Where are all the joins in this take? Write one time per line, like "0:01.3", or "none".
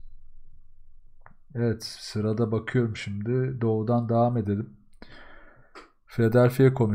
none